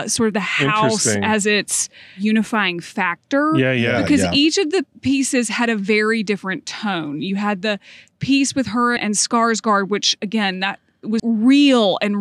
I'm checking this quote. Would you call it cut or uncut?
cut